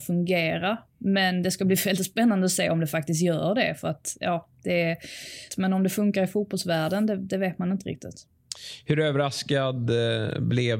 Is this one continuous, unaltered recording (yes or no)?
no